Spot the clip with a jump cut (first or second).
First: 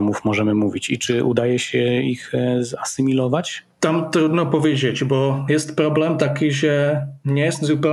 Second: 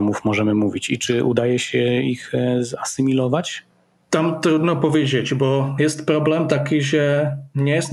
first